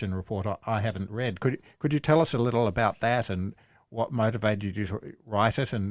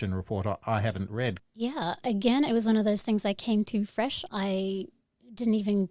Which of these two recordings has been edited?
second; 2 cuts; at 1.4 s, 4.3 s

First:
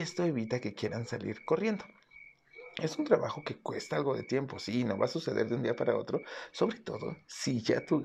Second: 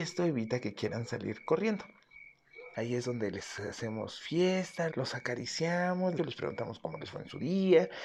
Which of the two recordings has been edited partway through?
second; 3 cuts; at 2.7 s, 4.9 s, 6.2 s

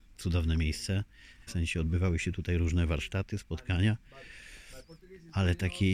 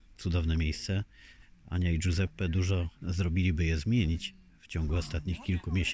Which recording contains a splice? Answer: first; 1 cut; at 1.5 s

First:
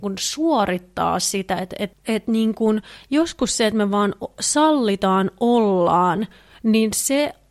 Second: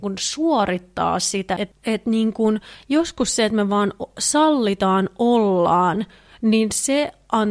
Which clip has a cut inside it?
second; 1 cut; at 1.6 s

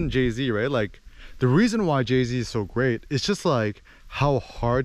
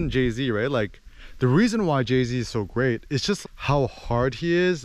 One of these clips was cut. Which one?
second; 1 cut; at 3.4 s

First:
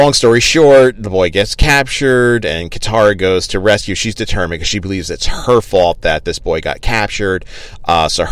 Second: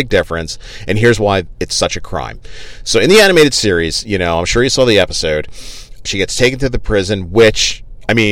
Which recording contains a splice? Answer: second; 1 cut; at 6.1 s

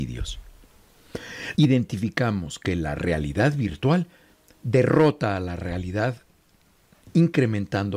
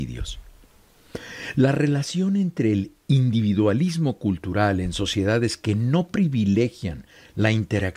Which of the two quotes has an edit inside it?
first; 1 cut; at 1.5 s

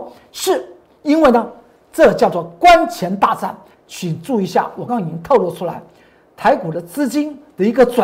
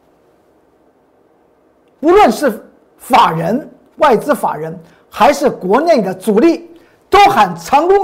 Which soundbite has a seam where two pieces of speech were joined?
first; 2 cuts; at 3.7 s, 4.9 s

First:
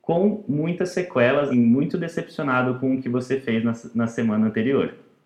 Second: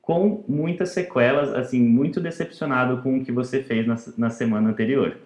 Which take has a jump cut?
first; 1 cut; at 1.5 s

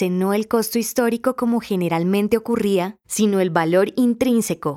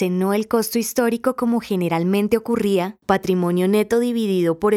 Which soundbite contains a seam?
second; 1 cut; at 3.0 s

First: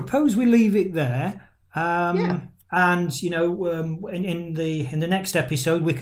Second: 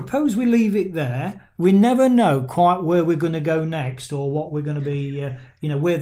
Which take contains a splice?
second; 1 cut; at 1.6 s

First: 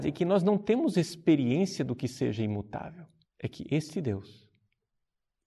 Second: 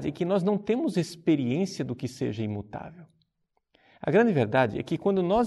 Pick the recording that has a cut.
first; 1 cut; at 3.2 s

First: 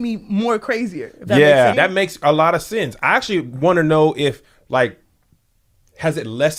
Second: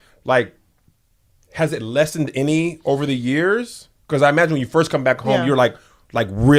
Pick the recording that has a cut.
first; 1 cut; at 1.7 s

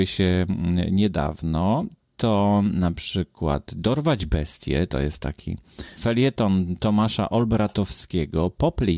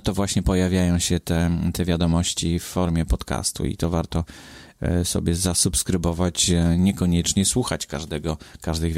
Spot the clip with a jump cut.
first; 1 cut; at 6.0 s

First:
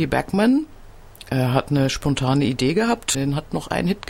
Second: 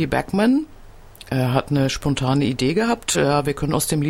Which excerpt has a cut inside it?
first; 1 cut; at 3.1 s

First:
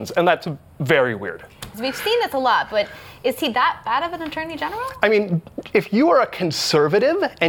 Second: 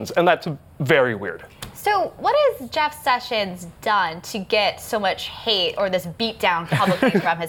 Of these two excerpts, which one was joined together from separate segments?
first; 1 cut; at 1.7 s

